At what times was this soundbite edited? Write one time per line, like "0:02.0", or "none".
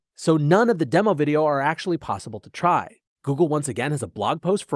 none